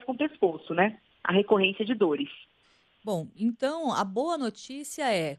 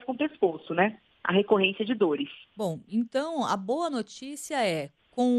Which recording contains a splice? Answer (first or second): second